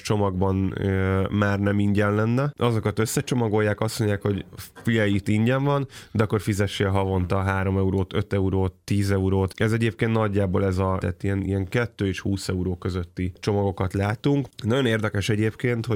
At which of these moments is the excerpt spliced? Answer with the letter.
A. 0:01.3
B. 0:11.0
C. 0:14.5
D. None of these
B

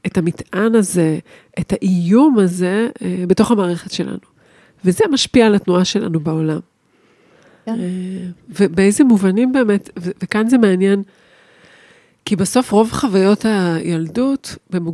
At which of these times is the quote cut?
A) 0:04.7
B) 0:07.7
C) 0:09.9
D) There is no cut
B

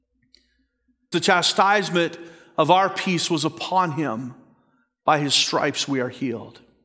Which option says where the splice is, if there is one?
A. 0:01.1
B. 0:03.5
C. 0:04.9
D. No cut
A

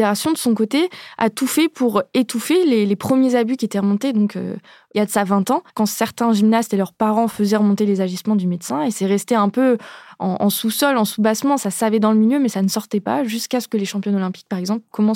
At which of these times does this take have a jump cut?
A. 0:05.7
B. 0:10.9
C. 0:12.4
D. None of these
A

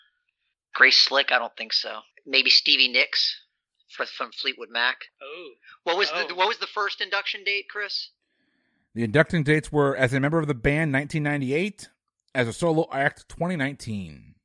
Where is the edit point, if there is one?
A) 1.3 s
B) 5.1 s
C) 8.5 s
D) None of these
D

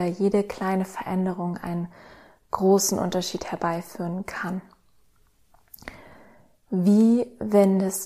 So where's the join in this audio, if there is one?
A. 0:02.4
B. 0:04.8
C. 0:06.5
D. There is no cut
D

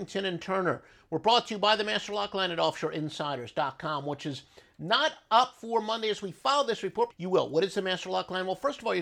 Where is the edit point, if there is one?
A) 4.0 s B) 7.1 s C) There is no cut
B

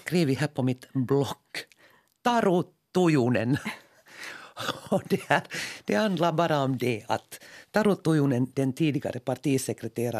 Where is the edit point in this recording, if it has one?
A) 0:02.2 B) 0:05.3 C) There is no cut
C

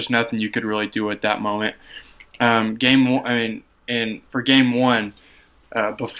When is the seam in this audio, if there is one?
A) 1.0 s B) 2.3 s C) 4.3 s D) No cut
C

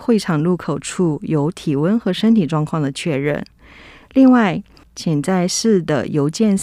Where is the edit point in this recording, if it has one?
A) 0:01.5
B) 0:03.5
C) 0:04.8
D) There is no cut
C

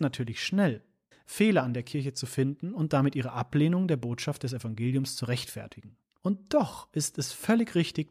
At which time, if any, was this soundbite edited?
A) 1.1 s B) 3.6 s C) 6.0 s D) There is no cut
A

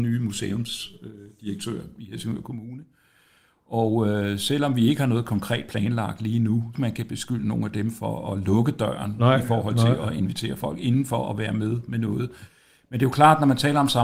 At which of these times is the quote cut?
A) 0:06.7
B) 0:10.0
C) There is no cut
A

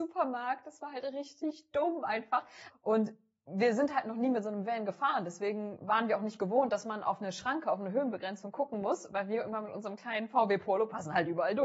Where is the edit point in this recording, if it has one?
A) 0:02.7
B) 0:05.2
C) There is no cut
A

